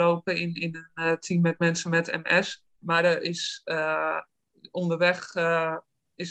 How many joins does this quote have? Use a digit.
1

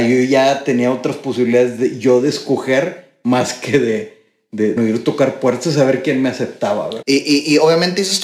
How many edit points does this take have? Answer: 2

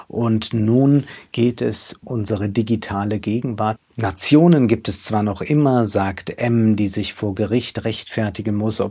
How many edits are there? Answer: 2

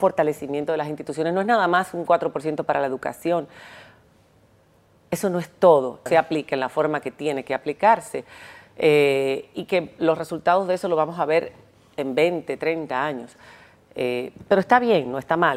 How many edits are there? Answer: 1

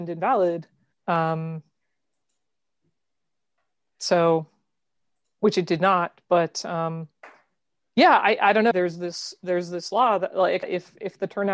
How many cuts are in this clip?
3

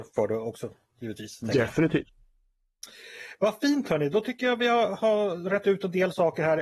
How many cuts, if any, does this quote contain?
0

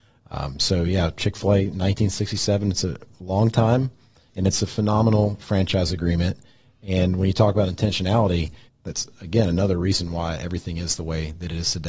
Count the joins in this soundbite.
2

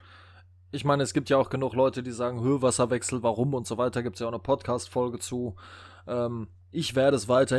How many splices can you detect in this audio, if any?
0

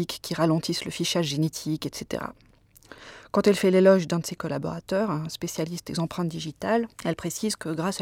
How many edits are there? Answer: 1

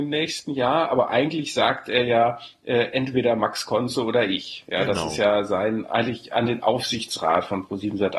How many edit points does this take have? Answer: 0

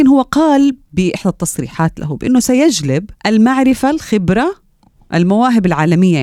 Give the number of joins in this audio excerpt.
1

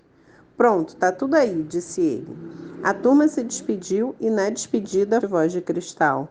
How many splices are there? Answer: 1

